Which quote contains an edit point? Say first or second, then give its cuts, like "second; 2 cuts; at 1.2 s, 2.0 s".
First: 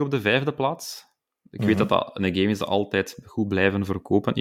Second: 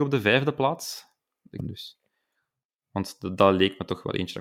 second; 1 cut; at 1.6 s